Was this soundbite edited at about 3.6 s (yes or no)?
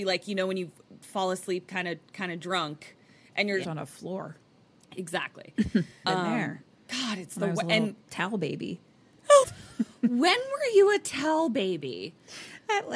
yes